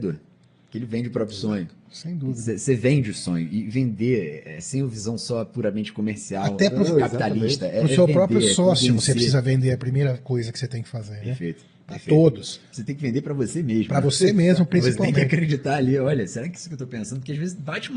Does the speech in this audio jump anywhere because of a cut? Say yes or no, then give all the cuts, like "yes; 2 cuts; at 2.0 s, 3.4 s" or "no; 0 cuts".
no; 0 cuts